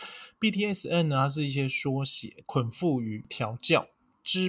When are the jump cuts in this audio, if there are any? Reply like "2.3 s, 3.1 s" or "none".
2.4 s